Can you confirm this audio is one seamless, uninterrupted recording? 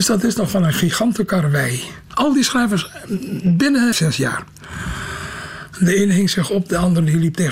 no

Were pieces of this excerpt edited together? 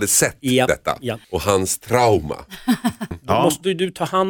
yes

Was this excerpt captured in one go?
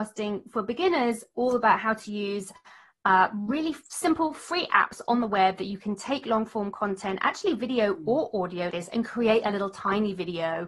no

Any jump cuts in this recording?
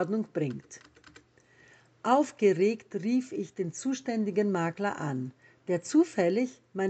no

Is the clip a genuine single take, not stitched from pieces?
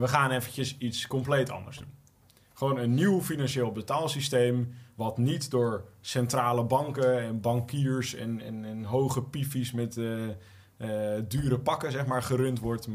yes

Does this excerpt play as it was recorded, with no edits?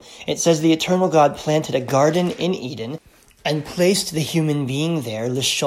yes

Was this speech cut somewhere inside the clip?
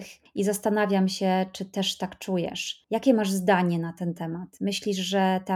no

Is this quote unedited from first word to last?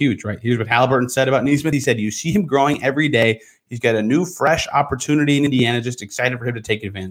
yes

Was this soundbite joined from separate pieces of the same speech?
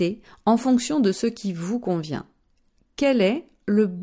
no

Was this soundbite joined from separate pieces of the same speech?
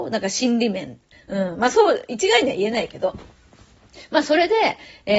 yes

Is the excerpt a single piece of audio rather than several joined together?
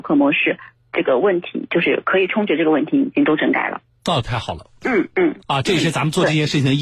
no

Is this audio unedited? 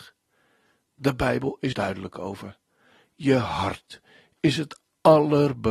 no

